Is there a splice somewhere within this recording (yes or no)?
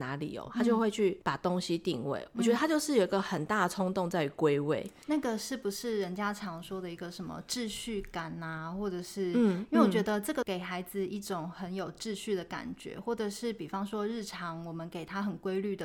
no